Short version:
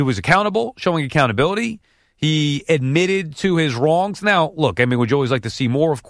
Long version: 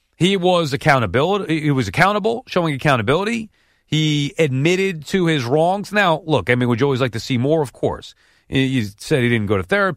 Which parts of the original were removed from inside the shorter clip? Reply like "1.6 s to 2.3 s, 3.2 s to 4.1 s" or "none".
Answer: none